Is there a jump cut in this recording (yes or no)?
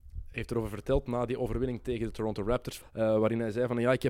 yes